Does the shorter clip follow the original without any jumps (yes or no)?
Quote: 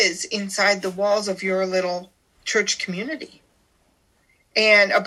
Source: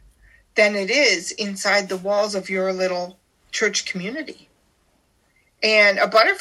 yes